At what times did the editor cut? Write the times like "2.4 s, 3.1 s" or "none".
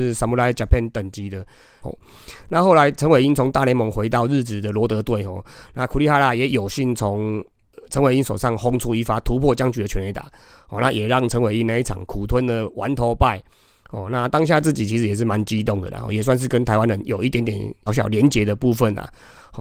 1.8 s, 17.9 s